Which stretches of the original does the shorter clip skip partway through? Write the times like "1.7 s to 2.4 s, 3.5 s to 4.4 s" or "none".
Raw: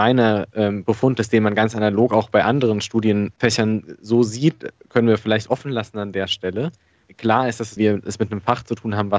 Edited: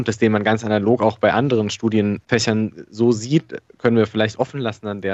none